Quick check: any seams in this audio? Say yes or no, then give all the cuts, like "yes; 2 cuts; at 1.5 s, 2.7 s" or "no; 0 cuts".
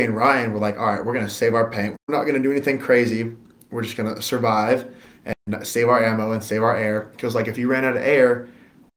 yes; 1 cut; at 1.9 s